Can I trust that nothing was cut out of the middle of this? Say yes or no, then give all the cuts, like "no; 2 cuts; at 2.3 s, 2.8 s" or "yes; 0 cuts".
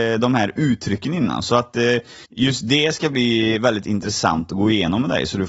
no; 1 cut; at 2.3 s